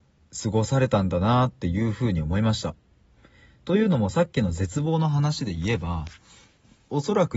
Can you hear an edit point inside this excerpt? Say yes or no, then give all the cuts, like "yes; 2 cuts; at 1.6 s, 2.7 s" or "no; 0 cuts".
no; 0 cuts